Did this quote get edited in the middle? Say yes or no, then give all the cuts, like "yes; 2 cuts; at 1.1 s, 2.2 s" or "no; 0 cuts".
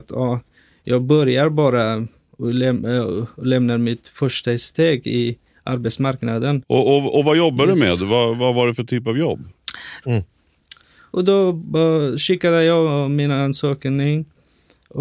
yes; 2 cuts; at 6.6 s, 10.0 s